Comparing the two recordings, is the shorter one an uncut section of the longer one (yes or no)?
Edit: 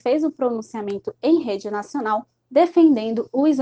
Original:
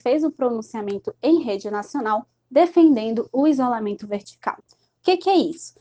yes